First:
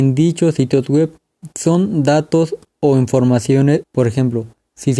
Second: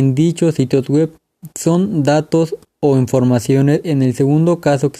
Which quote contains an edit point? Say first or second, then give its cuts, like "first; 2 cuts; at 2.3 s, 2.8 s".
first; 1 cut; at 3.8 s